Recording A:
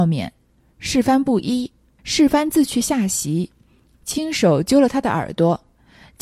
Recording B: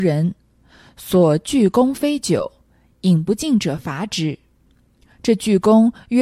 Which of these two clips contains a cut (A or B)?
A